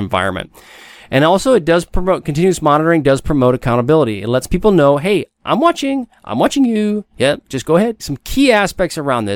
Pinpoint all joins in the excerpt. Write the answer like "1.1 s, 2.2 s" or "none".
8.0 s

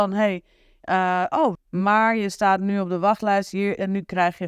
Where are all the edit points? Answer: 1.6 s

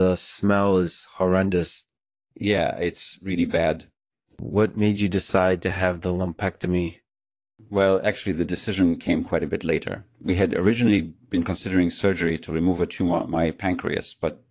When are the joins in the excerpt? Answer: none

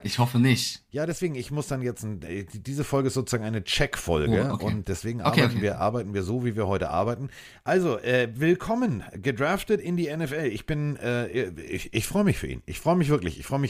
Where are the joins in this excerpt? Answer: 4.8 s

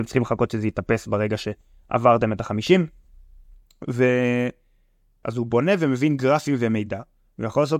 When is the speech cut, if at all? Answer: 5.2 s

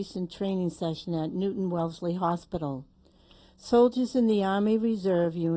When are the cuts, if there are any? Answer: none

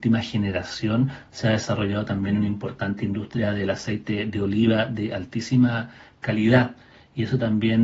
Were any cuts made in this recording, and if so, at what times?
none

